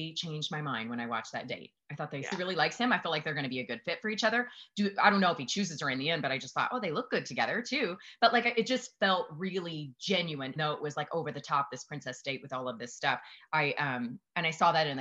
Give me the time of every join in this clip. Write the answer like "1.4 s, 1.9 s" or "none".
2.3 s, 10.6 s